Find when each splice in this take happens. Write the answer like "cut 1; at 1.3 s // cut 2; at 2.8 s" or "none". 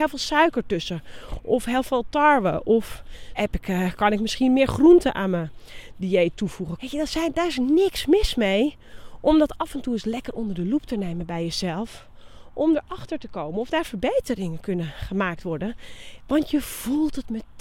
cut 1; at 3.3 s // cut 2; at 6.8 s